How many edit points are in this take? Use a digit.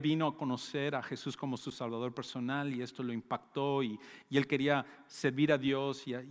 0